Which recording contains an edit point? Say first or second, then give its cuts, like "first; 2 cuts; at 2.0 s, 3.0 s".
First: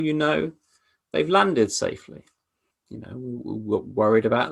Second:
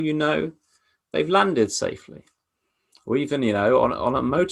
first; 1 cut; at 2.7 s